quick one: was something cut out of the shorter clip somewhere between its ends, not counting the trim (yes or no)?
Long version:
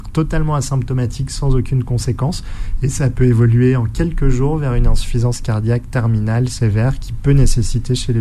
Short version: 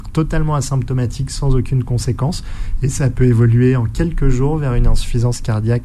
no